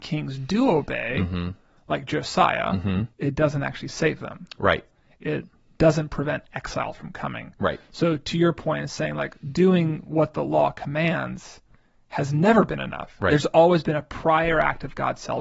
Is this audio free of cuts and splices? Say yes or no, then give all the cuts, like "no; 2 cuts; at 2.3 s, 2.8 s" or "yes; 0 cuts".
yes; 0 cuts